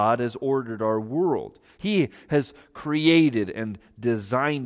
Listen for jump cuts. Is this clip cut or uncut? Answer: uncut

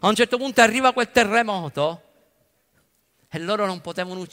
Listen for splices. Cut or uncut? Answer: uncut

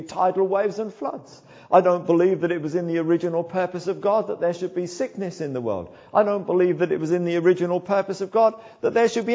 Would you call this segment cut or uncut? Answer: uncut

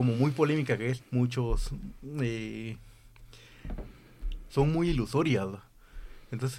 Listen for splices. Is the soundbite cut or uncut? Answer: cut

